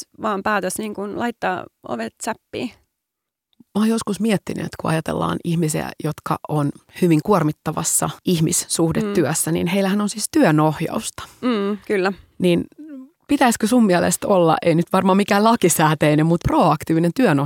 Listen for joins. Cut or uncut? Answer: uncut